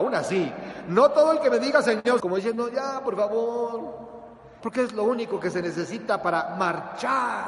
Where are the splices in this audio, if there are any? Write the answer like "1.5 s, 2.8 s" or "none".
2.2 s, 4.6 s

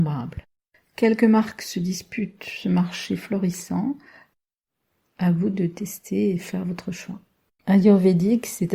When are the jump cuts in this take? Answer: 7.6 s

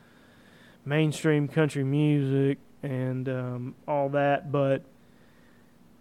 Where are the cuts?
none

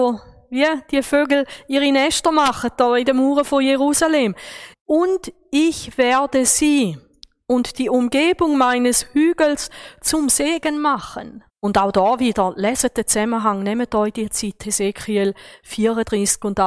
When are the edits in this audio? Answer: 4.7 s, 11.5 s

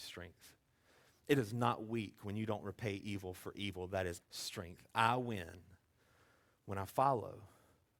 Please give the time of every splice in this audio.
4.2 s

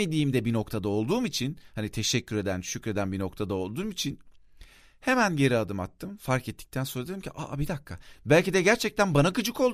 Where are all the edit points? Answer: 8.1 s

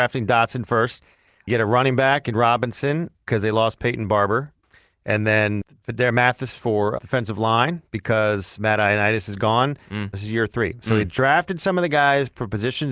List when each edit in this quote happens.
7.0 s, 10.1 s

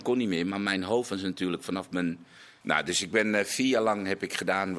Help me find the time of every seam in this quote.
2.6 s

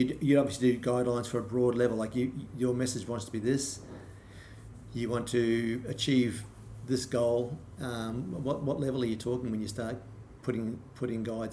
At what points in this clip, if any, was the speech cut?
none

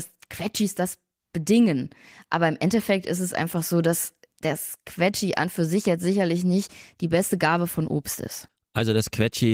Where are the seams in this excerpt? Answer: none

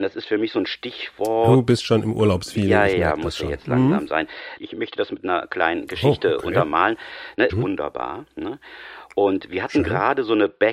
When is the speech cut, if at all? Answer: 4.6 s, 7.5 s

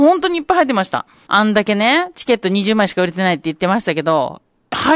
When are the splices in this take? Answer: 1.3 s

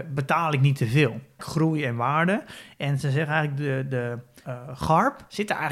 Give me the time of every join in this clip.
1.4 s

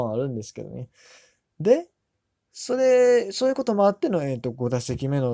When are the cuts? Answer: none

